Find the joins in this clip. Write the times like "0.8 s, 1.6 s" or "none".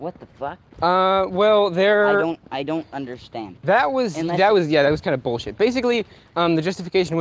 none